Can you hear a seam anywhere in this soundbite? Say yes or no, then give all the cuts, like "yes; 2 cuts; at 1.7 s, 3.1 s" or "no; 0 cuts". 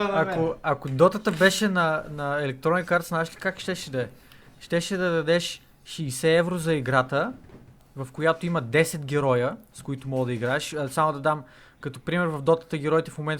no; 0 cuts